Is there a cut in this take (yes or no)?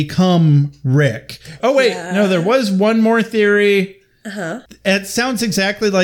yes